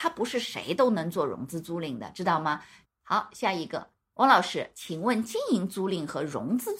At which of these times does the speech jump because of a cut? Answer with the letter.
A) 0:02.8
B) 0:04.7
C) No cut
A